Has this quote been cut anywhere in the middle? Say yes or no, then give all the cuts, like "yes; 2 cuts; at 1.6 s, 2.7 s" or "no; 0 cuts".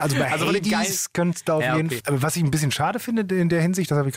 yes; 1 cut; at 2.0 s